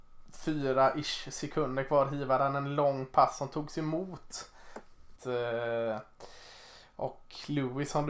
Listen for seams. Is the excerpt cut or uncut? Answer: cut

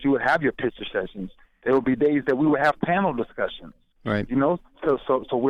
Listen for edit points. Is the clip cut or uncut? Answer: uncut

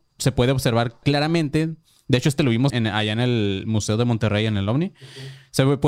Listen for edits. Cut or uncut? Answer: cut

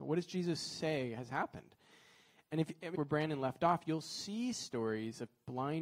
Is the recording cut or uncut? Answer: cut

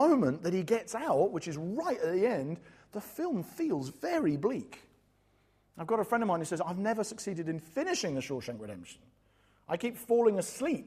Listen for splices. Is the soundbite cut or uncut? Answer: uncut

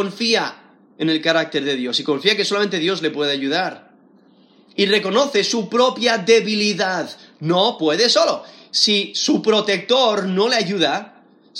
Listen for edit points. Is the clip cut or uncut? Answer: uncut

